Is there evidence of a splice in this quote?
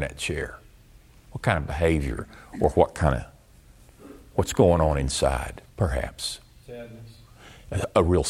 yes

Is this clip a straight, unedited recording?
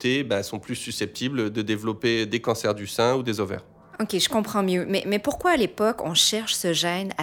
yes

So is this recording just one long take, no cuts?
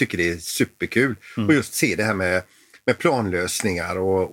yes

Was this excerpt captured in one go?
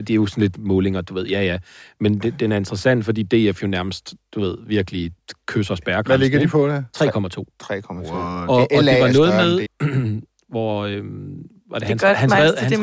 no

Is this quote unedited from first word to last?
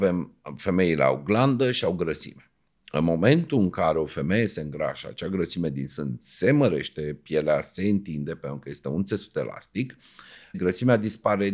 no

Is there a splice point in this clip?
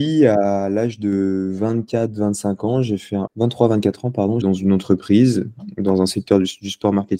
yes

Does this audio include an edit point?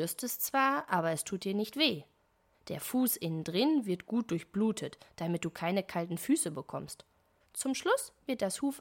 yes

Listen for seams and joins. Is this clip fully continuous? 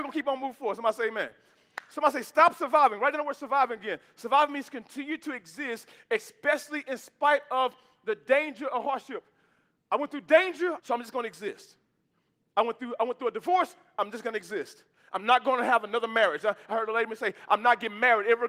no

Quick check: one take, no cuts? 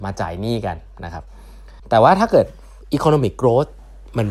no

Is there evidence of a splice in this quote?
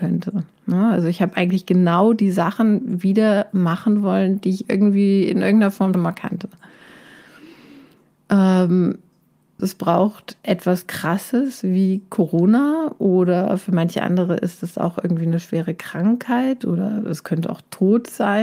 yes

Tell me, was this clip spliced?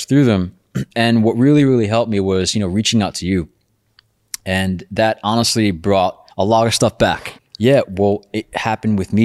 yes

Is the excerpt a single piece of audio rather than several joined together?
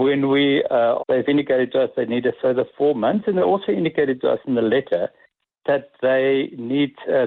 no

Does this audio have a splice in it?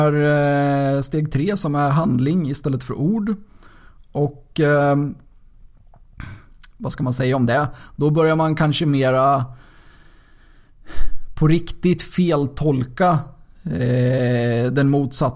no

